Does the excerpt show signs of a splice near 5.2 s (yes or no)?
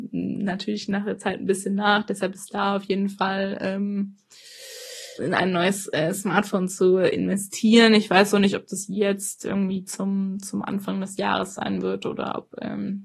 yes